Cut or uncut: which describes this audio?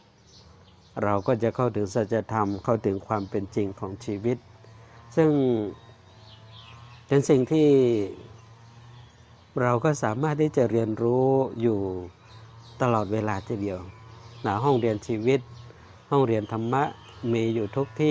uncut